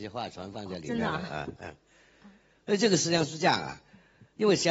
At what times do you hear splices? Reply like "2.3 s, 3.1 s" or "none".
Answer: 1.6 s

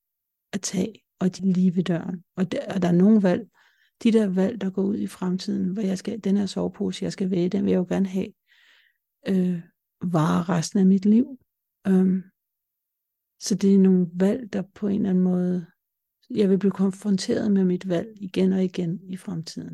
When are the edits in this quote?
1.4 s

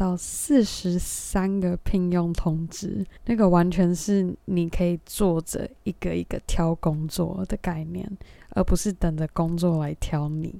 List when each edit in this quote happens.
3.2 s

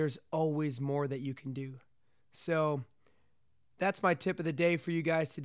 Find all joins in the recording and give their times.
none

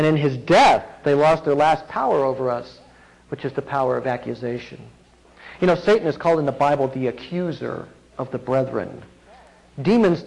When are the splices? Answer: none

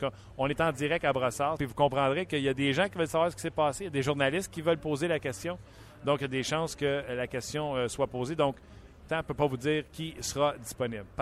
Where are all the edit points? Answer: 1.6 s, 9.1 s

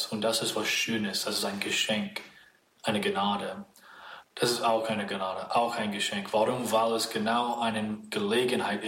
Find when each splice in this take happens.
4.2 s

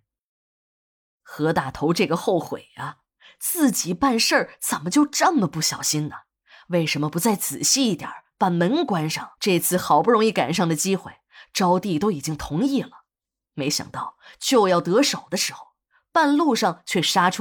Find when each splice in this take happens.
9.4 s

